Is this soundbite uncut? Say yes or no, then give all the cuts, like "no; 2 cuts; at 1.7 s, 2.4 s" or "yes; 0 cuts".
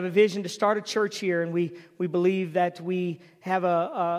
yes; 0 cuts